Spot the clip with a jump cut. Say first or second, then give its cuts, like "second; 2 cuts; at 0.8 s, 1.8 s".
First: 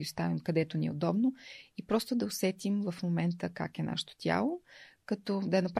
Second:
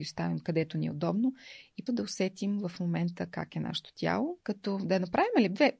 second; 2 cuts; at 1.9 s, 4.4 s